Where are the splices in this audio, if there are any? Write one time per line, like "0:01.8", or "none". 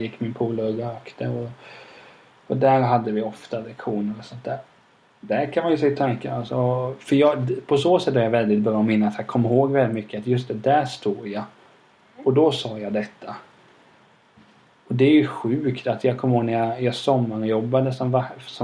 none